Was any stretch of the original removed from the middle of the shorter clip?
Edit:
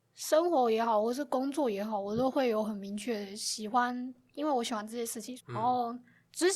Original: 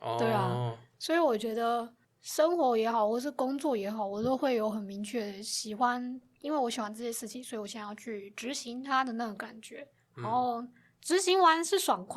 yes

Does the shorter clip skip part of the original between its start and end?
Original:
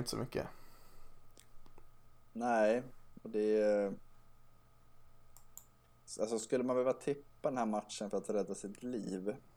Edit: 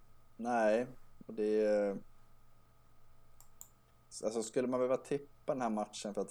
no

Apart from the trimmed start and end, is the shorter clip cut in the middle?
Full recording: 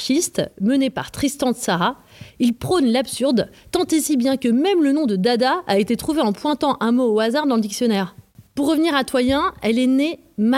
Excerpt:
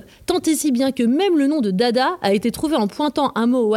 no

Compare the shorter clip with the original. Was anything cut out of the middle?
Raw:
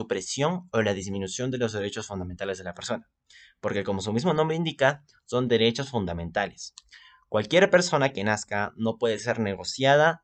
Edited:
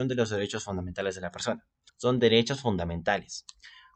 yes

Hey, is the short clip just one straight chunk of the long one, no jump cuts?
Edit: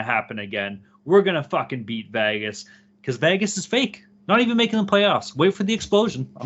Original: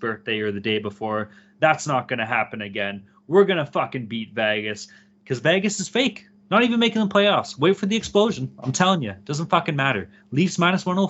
yes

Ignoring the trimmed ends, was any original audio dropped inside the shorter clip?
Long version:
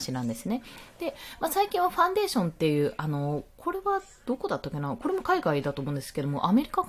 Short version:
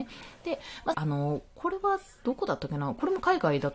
yes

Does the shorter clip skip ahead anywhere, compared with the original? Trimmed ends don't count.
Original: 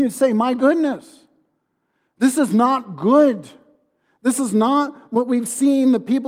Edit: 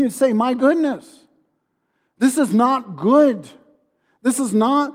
no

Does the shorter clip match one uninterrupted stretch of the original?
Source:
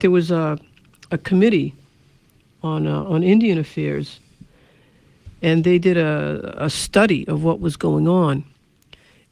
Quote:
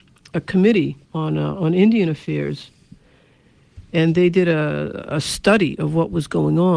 no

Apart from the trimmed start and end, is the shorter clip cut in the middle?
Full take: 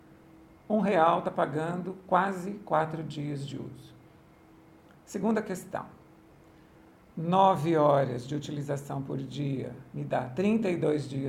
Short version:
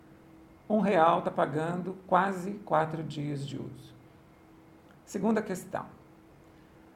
no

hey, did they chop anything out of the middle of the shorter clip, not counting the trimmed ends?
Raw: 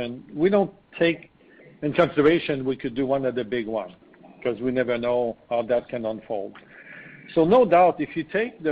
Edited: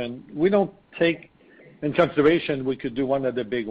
no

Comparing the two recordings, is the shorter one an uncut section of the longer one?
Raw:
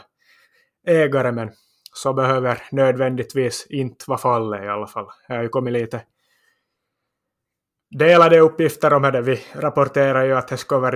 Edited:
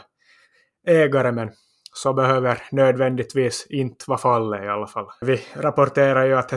no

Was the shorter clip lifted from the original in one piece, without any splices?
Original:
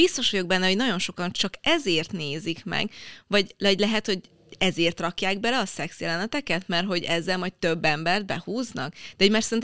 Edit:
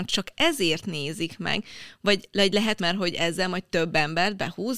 no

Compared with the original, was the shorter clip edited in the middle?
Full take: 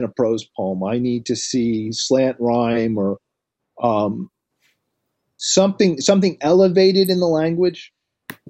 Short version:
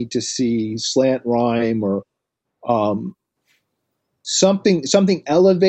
no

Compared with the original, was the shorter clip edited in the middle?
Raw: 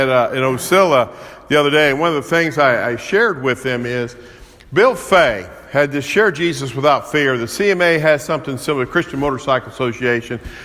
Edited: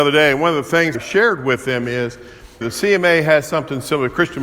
yes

